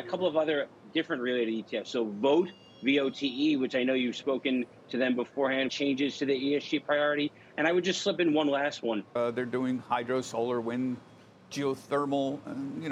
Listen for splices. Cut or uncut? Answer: cut